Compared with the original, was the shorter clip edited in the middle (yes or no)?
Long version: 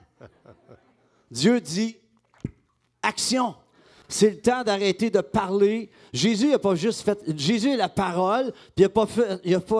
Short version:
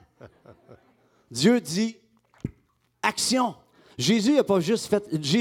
yes